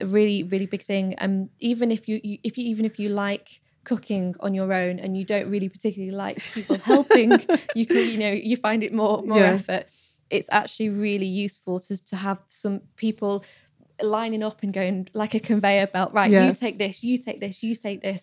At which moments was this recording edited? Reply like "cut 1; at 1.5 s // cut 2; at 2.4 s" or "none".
none